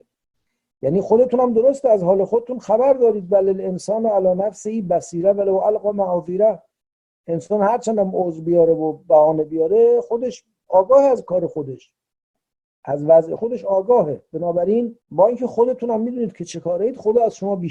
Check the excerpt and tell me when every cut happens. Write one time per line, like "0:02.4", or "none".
0:13.4
0:15.0